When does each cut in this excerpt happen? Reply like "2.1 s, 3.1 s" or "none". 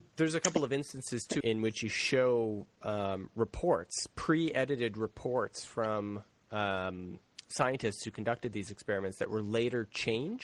1.4 s